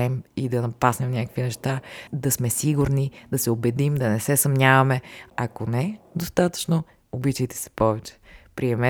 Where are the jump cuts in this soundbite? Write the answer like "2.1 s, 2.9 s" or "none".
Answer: 2.1 s, 5.3 s